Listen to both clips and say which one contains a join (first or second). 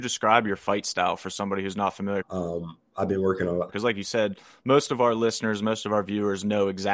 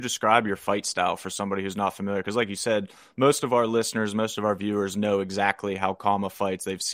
first